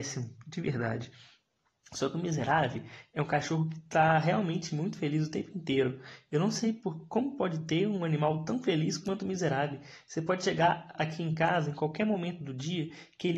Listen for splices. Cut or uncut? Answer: uncut